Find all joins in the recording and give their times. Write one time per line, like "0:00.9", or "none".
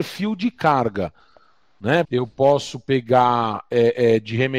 0:02.0